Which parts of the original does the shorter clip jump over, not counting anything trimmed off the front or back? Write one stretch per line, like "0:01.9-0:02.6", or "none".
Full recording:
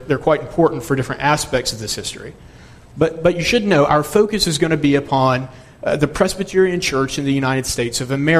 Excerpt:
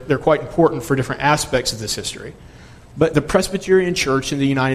0:03.1-0:06.0